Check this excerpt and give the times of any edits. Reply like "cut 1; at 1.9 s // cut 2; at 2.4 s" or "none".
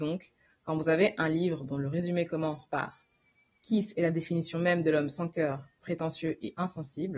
none